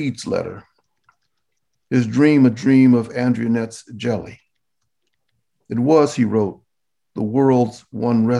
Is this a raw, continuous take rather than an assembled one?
yes; 0 cuts

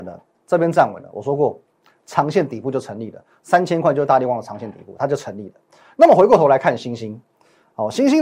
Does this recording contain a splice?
no; 0 cuts

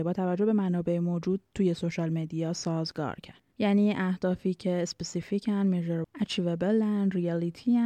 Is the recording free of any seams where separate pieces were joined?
no; 2 cuts; at 3.5 s, 6.0 s

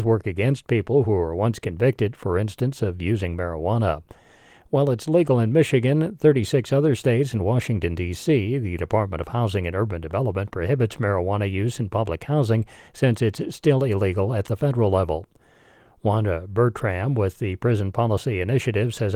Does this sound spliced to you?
no; 0 cuts

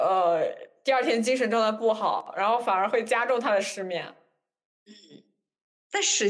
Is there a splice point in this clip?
no; 0 cuts

